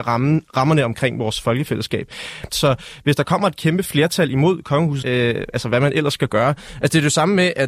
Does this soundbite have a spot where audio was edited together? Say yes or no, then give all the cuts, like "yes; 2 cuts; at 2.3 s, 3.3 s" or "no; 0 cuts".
yes; 2 cuts; at 2.5 s, 5.0 s